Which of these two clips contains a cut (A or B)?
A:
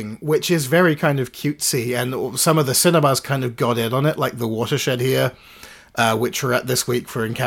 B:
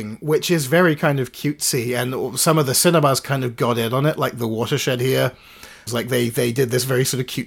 B